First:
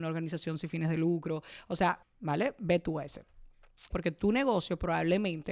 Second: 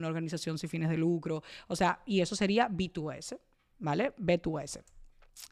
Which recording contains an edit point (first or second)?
first